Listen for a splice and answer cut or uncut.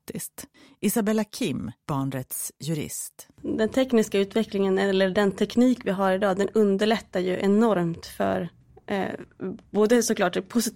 uncut